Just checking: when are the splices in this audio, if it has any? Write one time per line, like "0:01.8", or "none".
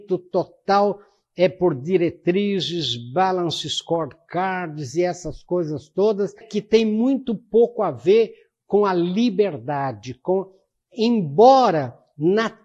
0:06.4